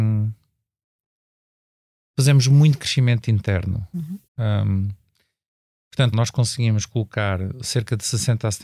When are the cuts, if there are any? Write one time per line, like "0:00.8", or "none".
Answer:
0:04.3
0:06.1